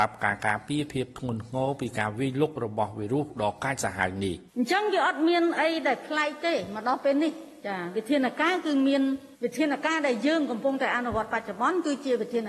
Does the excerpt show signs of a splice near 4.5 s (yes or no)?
yes